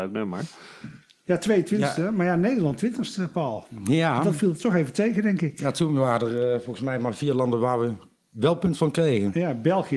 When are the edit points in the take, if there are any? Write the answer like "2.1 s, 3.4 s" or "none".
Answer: none